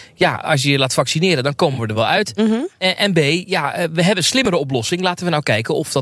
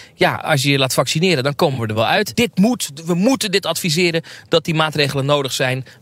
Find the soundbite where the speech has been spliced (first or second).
second